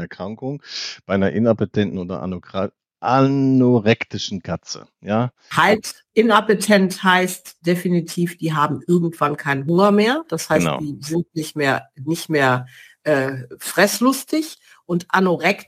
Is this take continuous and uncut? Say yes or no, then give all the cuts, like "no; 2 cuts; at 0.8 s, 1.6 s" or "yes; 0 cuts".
yes; 0 cuts